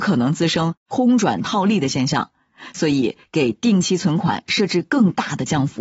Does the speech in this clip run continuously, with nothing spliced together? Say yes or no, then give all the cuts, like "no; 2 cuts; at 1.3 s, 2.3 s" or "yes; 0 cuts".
yes; 0 cuts